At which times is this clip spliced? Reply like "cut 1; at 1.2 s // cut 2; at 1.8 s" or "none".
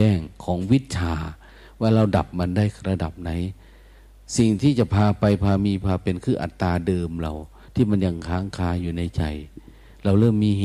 none